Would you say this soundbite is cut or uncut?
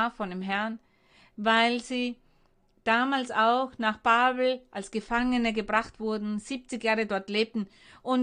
uncut